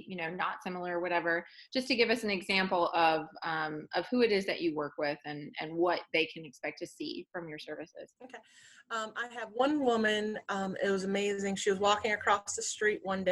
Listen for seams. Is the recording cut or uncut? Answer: cut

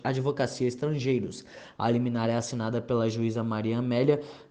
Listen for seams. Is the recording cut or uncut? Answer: cut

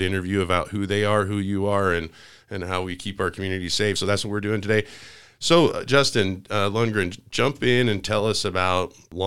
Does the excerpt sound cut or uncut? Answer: uncut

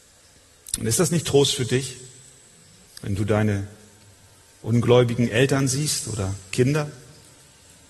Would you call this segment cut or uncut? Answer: cut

